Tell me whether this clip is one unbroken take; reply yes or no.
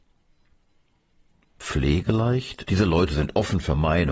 no